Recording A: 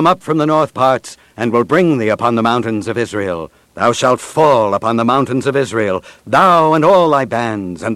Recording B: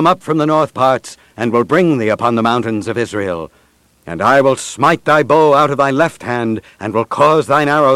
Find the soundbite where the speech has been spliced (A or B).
A